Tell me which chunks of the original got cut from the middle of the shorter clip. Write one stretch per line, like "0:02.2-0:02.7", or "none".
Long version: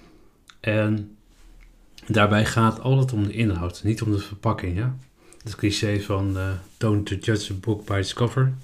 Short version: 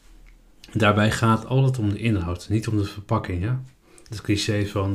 none